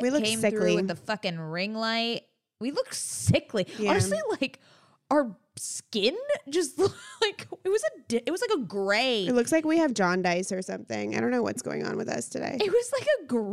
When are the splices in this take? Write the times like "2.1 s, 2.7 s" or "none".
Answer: none